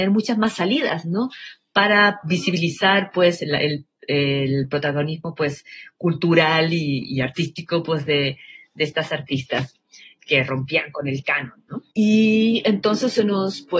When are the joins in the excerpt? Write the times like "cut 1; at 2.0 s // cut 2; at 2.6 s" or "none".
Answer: cut 1; at 11.9 s